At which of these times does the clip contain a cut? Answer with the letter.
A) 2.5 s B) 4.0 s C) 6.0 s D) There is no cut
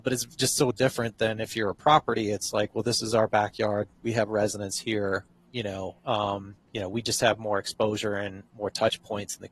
D